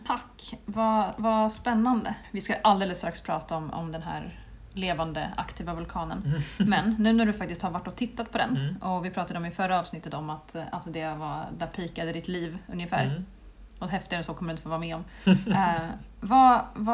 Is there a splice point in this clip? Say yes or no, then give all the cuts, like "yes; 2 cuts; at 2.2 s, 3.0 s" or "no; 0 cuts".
no; 0 cuts